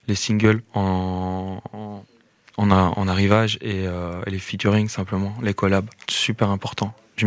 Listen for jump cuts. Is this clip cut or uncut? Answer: uncut